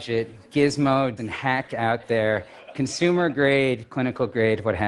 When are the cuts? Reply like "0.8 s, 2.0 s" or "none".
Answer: 1.2 s